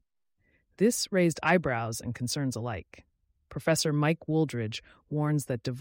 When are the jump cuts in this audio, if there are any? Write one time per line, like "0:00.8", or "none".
0:03.4